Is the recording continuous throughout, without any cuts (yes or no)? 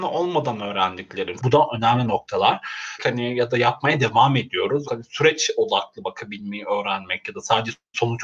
no